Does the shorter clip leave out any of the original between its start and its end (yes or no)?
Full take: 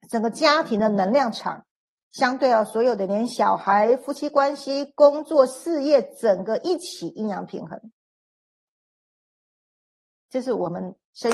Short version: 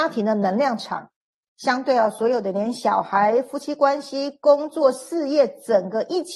no